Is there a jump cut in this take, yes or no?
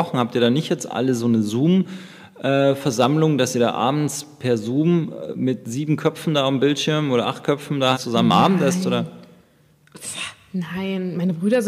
yes